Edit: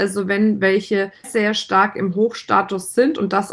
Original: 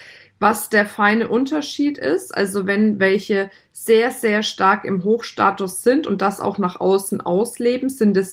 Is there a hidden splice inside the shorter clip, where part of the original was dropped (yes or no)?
yes